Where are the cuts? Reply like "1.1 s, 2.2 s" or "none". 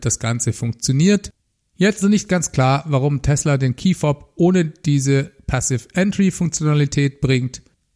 2.0 s